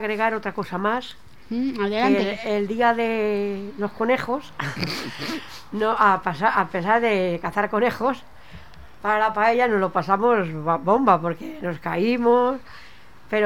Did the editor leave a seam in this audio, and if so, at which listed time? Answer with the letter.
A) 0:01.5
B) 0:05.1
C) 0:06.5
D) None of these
D